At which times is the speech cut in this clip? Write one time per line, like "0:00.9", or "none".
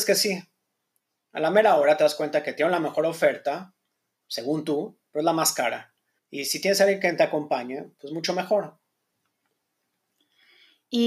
0:06.2

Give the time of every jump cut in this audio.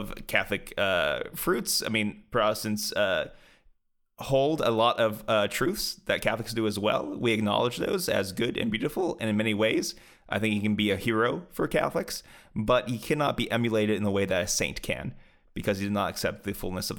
none

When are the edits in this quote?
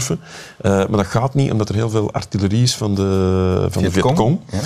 none

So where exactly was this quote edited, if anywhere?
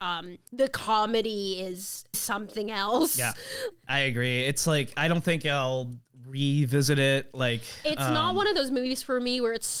0:02.1
0:03.7

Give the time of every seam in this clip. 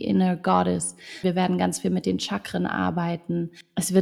0:01.2

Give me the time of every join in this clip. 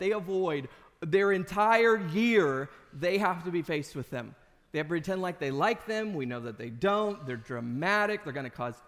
none

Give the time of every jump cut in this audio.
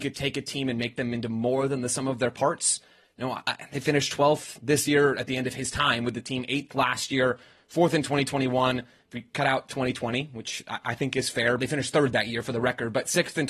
0:11.6

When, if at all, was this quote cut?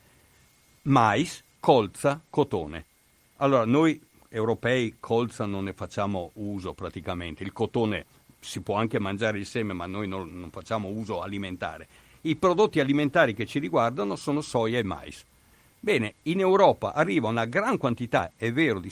0:01.6

